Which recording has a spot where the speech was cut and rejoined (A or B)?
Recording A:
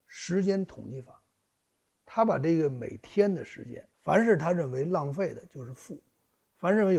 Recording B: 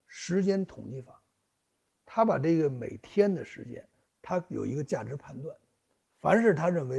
A